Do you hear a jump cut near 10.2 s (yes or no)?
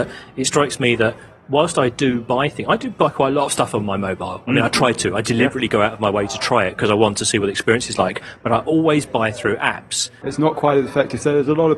yes